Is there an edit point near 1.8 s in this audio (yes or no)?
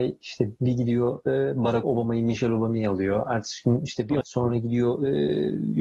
yes